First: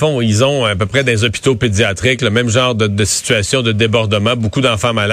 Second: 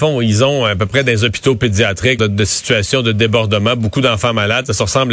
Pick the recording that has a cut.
second; 1 cut; at 2.2 s

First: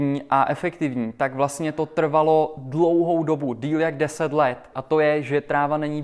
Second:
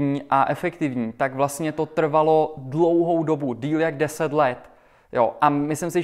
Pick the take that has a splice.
first; 1 cut; at 4.7 s

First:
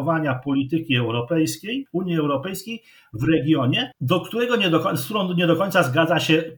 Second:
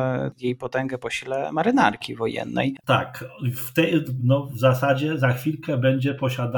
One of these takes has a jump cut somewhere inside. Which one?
second; 2 cuts; at 2.8 s, 4.2 s

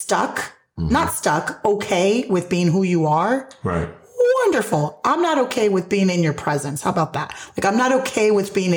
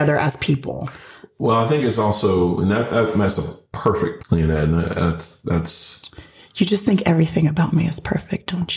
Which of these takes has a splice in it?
second; 1 cut; at 4.2 s

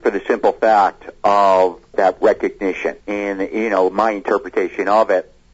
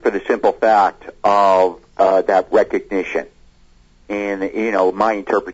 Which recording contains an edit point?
first; 2 cuts; at 1.9 s, 3.0 s

